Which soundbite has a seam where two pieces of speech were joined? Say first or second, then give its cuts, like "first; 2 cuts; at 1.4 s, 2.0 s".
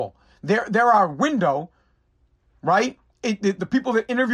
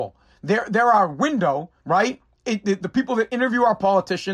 second; 1 cut; at 1.8 s